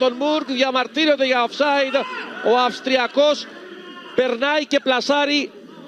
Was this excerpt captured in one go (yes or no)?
yes